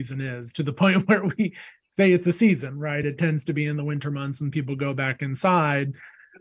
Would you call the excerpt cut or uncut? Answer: uncut